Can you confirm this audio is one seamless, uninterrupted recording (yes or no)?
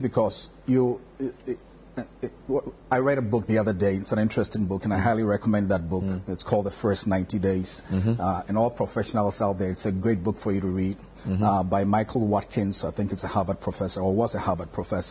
yes